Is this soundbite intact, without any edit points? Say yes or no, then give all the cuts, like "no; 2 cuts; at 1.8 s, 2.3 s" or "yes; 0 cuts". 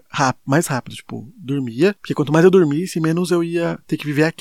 yes; 0 cuts